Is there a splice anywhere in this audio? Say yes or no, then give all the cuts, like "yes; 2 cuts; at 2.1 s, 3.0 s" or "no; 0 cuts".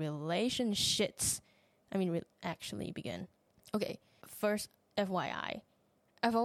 yes; 1 cut; at 2.3 s